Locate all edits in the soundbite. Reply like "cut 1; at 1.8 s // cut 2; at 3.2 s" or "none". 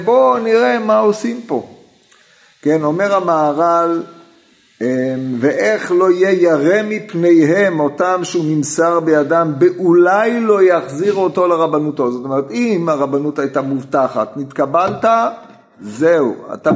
none